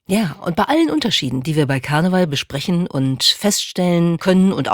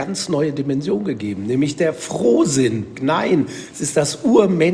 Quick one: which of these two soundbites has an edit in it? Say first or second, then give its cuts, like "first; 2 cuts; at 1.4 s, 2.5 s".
second; 1 cut; at 2.9 s